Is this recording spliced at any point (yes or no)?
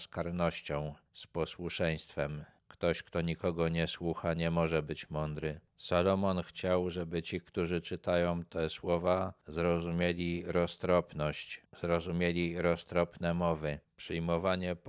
yes